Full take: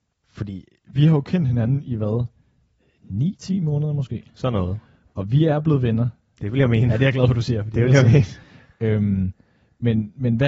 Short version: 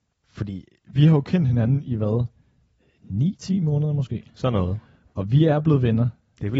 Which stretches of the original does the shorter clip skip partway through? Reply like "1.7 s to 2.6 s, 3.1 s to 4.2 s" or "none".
none